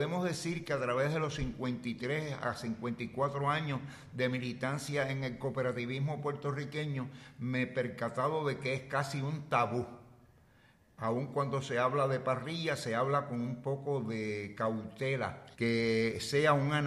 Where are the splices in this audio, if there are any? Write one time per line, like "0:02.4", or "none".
0:15.5